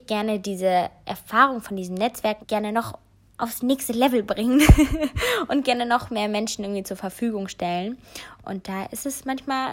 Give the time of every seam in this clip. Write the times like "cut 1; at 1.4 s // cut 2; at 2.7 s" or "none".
cut 1; at 2.4 s // cut 2; at 8.4 s